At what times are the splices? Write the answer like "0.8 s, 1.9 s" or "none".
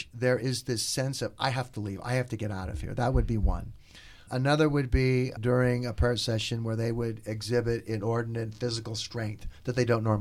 4.3 s, 5.4 s

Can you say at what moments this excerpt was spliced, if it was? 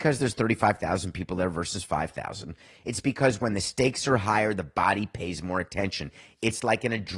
none

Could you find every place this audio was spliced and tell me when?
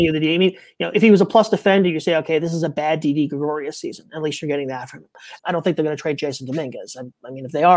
0.9 s, 5.4 s

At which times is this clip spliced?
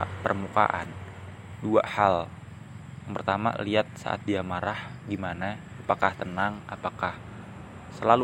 none

